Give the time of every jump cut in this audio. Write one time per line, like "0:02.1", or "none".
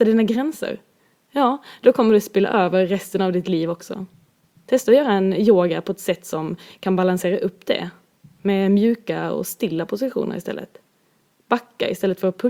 0:04.6